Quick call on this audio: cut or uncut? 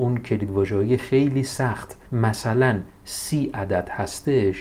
cut